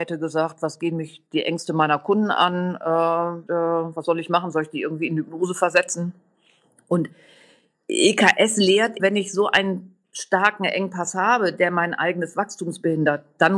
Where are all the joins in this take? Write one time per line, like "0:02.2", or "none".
0:03.5
0:09.0